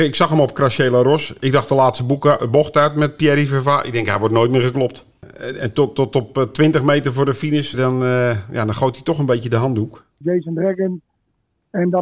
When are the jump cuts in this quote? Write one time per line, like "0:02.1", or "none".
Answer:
0:07.7
0:10.2

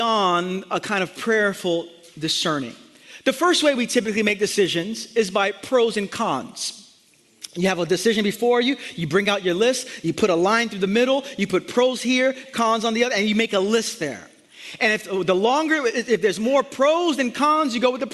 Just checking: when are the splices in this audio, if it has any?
none

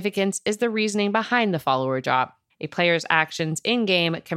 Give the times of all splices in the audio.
0:02.5

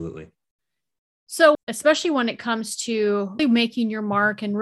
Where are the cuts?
0:01.5
0:03.4

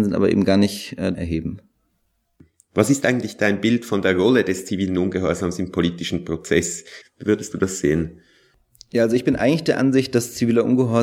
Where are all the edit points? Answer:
0:01.1
0:07.0

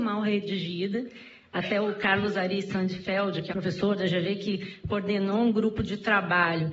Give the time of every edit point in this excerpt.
0:03.5

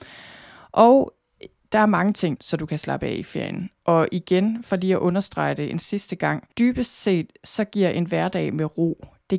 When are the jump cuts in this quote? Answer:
0:02.4
0:06.5

